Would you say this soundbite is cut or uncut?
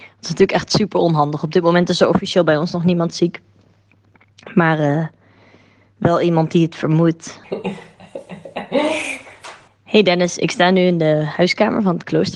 cut